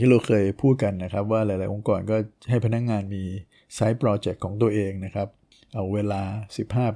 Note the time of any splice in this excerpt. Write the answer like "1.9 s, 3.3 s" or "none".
none

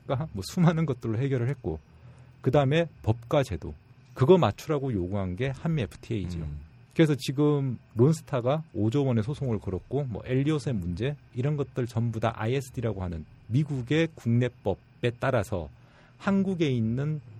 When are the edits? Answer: none

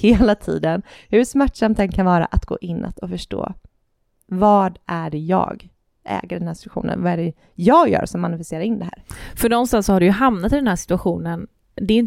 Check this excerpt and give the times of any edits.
none

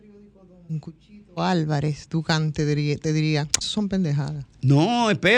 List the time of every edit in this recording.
3.6 s

